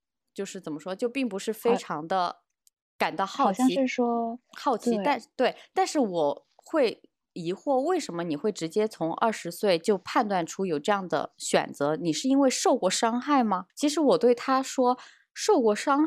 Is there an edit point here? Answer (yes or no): yes